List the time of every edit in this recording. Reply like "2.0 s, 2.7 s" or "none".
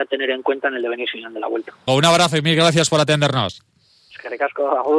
1.9 s